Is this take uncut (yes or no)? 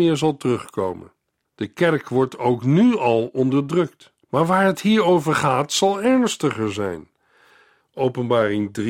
no